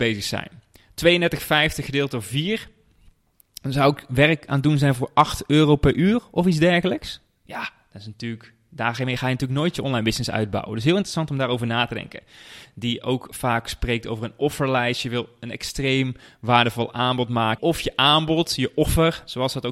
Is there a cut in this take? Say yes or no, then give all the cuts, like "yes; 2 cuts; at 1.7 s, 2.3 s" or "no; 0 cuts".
yes; 2 cuts; at 12.6 s, 17.6 s